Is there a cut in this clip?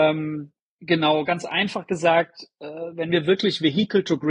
no; 0 cuts

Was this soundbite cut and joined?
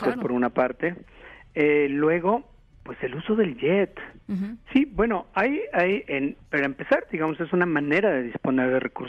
yes; 1 cut; at 4.7 s

